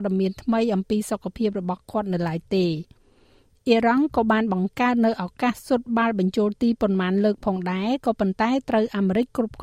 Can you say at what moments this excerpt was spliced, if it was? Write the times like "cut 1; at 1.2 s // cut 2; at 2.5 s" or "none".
none